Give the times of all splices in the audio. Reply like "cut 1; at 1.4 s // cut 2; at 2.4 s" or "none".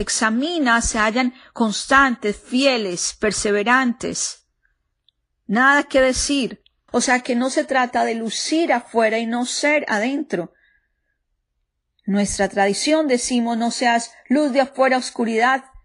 cut 1; at 6.9 s